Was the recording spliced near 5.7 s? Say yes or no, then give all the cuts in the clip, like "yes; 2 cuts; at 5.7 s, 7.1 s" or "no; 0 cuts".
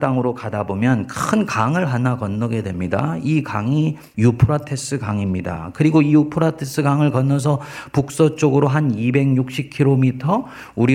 no; 0 cuts